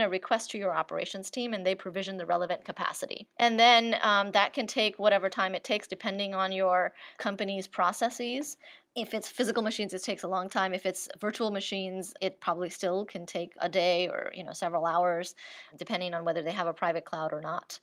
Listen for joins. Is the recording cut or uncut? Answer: cut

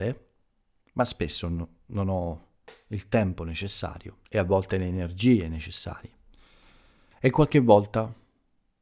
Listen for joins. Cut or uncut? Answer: cut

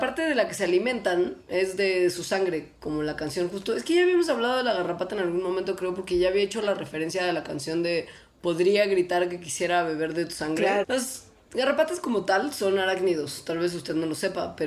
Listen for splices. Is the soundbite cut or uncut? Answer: cut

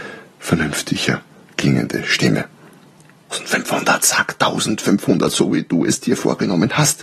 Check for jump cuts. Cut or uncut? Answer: cut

